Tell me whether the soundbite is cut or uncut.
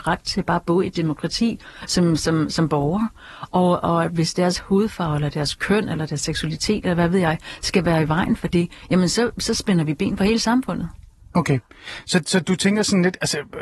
uncut